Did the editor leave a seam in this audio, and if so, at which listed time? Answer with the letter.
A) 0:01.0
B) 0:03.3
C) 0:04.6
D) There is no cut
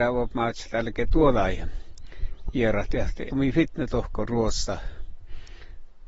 B